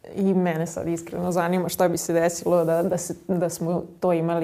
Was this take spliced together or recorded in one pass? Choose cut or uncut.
uncut